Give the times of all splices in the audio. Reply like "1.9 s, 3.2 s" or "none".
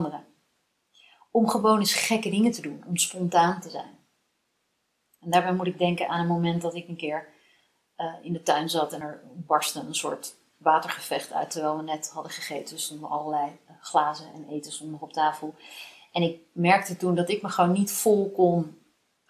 none